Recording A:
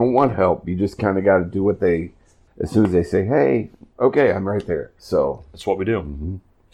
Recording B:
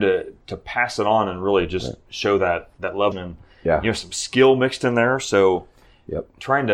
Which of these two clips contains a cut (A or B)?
B